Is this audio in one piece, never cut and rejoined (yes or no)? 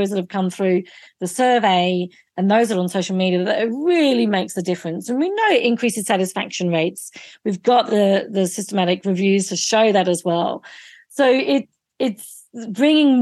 yes